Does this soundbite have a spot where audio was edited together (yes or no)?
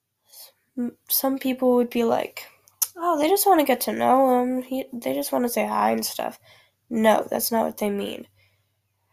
no